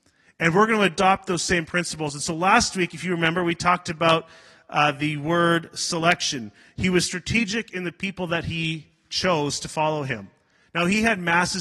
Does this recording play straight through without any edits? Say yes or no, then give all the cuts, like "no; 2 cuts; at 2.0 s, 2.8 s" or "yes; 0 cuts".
yes; 0 cuts